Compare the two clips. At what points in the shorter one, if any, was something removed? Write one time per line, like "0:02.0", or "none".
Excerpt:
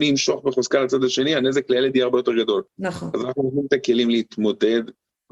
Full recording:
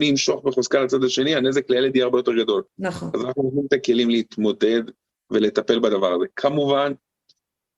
none